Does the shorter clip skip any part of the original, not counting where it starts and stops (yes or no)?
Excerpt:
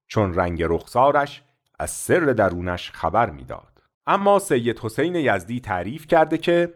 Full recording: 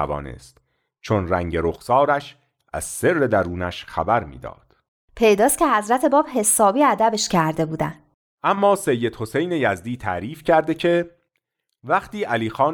yes